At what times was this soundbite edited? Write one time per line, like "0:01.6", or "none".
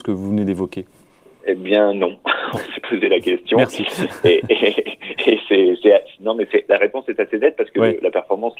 none